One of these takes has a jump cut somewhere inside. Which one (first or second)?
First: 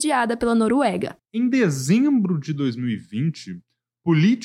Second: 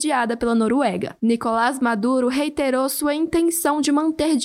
first